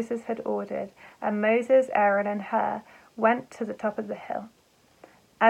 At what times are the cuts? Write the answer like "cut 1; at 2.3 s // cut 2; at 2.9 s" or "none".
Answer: none